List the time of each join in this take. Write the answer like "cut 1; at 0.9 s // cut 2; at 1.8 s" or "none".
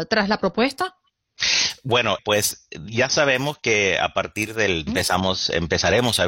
cut 1; at 2.2 s // cut 2; at 4.9 s